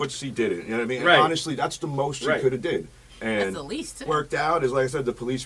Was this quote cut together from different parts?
yes; 1 cut; at 4.1 s

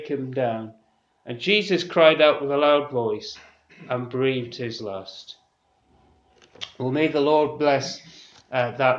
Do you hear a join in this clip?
no; 0 cuts

